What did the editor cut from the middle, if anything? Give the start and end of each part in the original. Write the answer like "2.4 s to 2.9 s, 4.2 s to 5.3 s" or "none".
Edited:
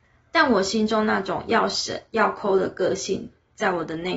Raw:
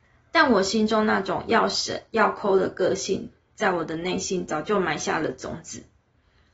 none